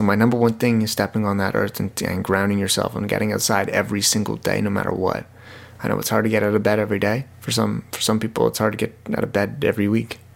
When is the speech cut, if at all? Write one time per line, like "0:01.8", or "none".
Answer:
0:07.3

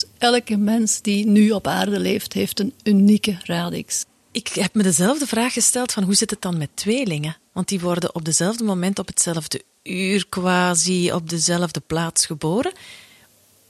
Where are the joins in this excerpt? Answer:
none

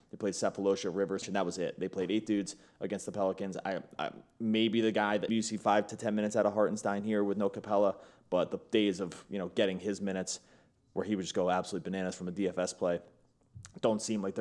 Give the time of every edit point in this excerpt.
0:01.2
0:05.3

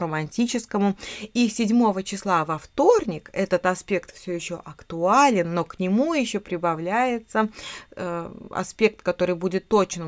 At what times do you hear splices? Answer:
none

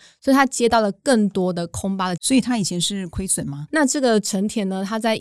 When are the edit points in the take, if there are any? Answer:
0:02.2
0:03.7

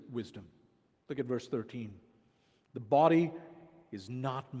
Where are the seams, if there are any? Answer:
none

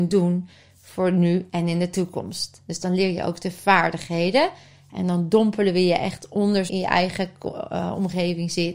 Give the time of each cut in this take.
0:06.7

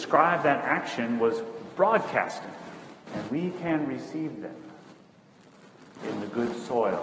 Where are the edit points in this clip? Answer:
0:03.1

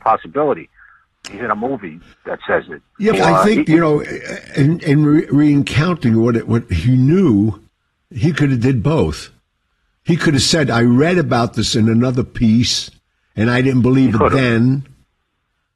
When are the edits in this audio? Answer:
0:01.1
0:03.1

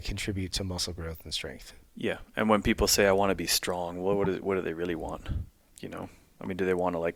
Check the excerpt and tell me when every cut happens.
0:05.7

